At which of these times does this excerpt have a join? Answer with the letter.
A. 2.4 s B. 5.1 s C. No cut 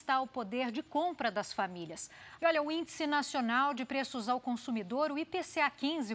A